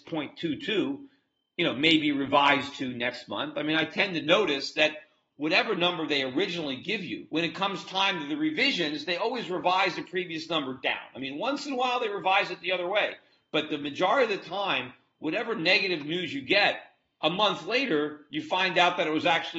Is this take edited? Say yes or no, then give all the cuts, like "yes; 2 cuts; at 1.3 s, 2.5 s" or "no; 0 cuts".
no; 0 cuts